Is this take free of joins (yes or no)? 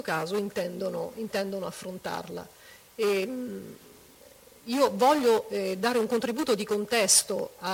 no